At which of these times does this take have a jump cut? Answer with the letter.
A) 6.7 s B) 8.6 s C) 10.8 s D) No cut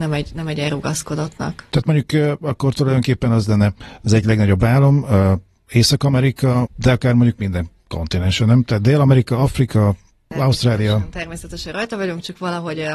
A